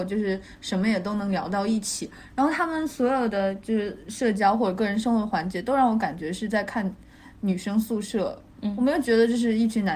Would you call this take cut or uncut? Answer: uncut